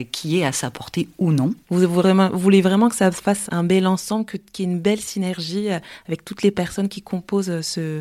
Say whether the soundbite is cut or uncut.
cut